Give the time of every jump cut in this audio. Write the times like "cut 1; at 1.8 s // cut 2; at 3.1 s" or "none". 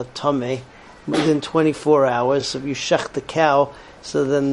none